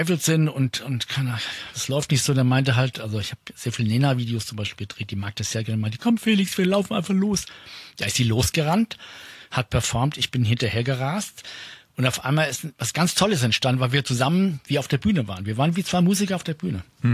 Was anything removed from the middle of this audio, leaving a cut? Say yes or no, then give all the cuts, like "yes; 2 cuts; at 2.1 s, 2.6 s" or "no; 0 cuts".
yes; 1 cut; at 1.7 s